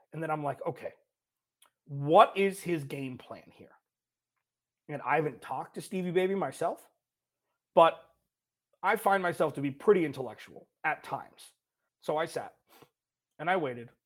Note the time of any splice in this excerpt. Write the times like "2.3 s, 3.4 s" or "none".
11.9 s